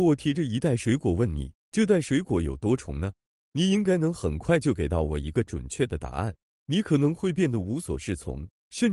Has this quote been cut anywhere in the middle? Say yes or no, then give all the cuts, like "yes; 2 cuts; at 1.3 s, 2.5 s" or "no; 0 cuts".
yes; 1 cut; at 6.5 s